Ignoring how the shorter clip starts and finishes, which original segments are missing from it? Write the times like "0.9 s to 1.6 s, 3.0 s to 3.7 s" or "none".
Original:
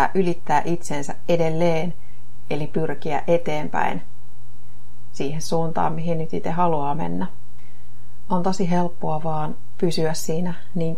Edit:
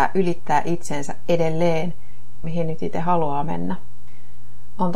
2.4 s to 5.9 s